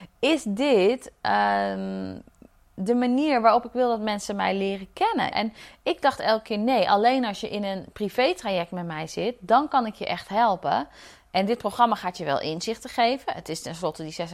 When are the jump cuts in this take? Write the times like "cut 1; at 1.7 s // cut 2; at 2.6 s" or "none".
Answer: cut 1; at 5.3 s

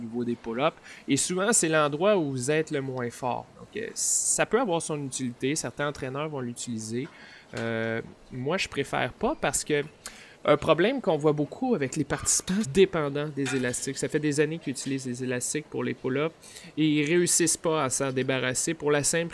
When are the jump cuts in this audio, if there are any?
cut 1; at 10.4 s // cut 2; at 12.6 s

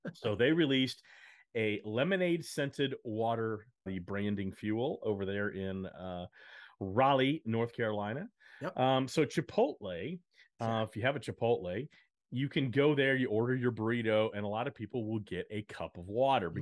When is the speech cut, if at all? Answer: cut 1; at 3.9 s

